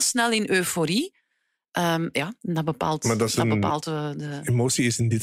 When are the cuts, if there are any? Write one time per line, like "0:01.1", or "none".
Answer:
none